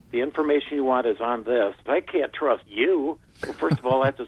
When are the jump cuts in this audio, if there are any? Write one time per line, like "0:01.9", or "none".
0:01.9